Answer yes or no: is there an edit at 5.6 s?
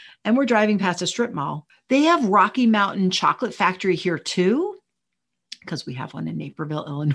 no